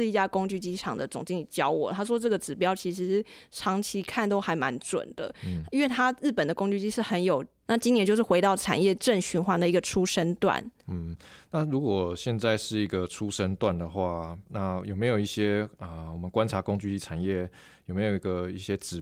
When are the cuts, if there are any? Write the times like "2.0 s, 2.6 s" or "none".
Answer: 7.6 s